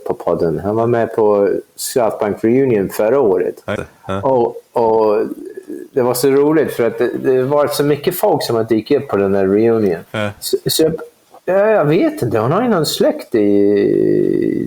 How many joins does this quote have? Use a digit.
2